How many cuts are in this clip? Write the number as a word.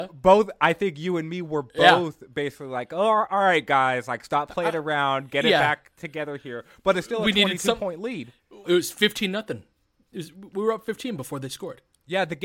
one